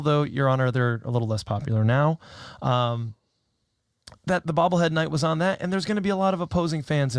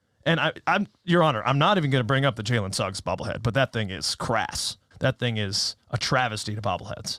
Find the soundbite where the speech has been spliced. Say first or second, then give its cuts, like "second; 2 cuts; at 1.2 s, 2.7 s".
second; 1 cut; at 4.9 s